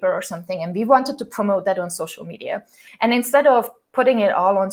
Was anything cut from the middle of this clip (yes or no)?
yes